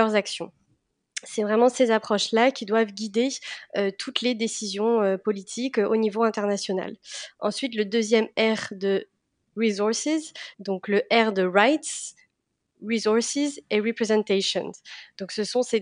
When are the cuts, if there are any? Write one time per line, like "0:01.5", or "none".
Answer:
0:10.5